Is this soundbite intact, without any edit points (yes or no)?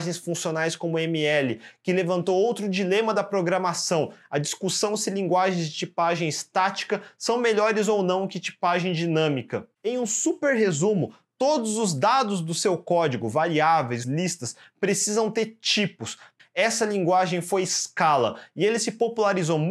no